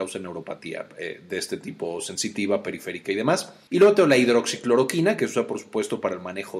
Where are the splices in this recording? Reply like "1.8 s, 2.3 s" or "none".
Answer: 3.7 s